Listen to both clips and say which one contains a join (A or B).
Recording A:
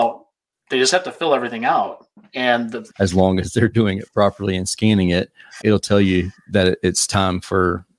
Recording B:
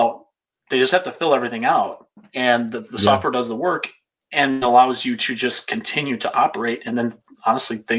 A